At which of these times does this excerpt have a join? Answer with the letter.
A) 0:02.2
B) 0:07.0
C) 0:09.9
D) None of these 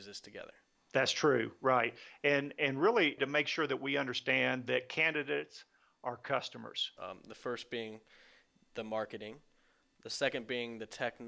B